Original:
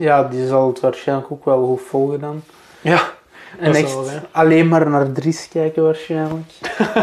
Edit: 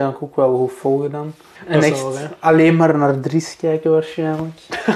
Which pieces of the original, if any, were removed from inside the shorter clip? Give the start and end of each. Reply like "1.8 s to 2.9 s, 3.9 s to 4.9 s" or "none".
2.6 s to 3.5 s